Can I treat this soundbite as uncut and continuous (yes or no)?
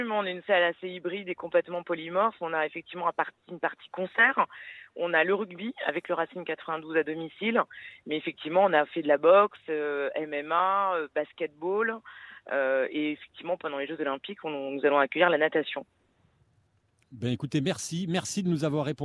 yes